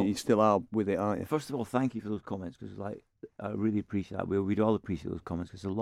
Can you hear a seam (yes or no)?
no